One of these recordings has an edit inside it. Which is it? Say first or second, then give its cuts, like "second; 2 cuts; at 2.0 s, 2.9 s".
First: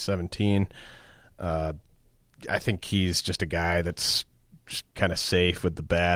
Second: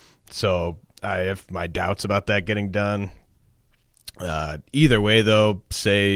first; 2 cuts; at 2.5 s, 4.9 s